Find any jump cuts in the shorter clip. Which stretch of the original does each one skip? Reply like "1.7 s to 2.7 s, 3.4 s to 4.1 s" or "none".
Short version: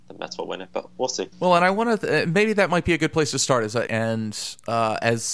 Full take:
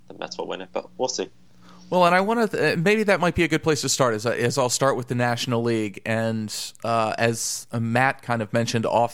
1.3 s to 1.8 s, 4.4 s to 6.0 s